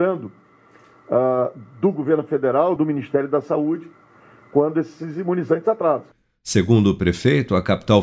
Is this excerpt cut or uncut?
cut